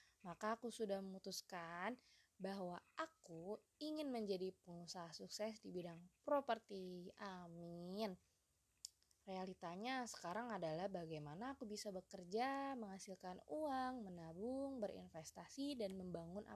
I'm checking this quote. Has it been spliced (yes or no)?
no